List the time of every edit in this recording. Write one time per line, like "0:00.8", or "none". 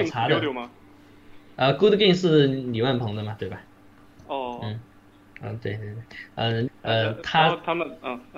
0:04.2
0:06.7